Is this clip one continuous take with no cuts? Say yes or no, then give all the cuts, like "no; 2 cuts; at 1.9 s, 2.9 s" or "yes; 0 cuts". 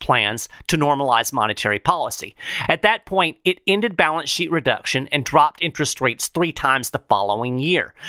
yes; 0 cuts